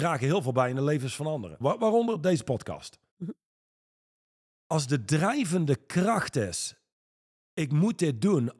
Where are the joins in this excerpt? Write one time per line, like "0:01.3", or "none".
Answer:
0:01.6

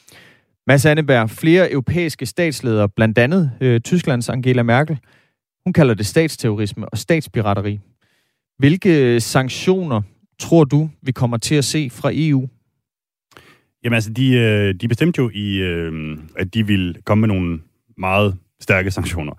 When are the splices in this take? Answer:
0:16.3

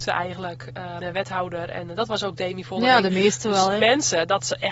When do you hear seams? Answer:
0:01.0
0:03.8

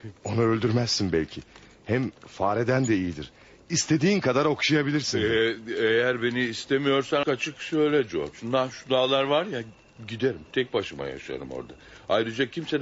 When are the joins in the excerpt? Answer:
0:07.2

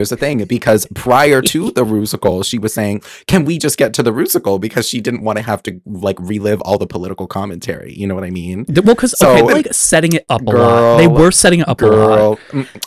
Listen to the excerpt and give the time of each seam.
0:09.5

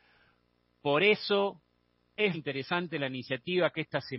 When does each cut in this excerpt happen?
0:02.3

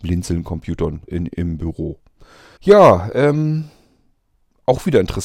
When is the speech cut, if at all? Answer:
0:01.1
0:02.6

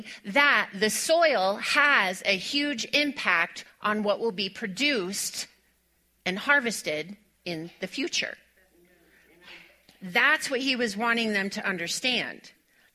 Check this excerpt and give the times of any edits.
none

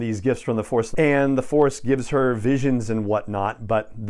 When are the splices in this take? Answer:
0:00.9

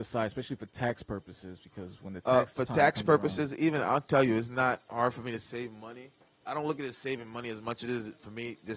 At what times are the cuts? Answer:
none

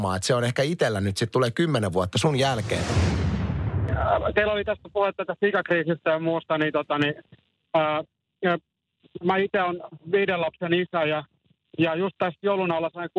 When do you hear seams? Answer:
none

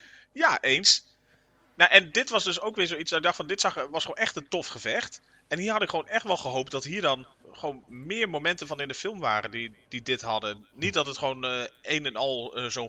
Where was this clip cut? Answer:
0:07.4

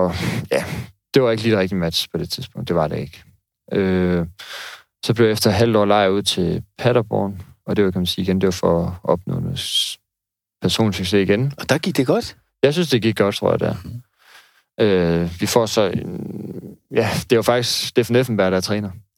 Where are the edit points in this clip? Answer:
0:13.3

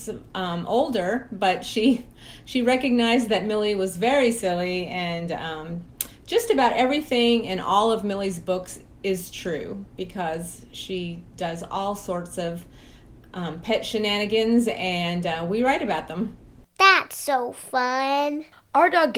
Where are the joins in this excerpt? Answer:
none

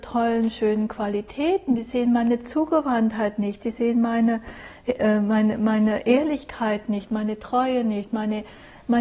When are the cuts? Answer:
0:07.1

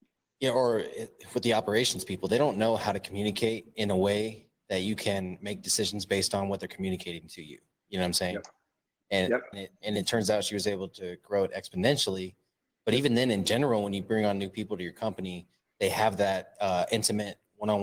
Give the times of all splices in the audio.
0:09.5

